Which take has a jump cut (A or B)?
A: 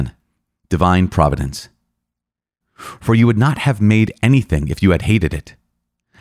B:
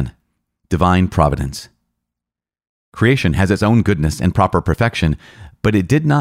A